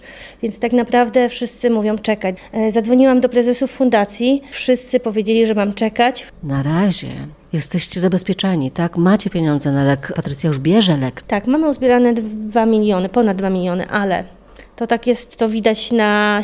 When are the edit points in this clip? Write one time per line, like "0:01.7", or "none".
none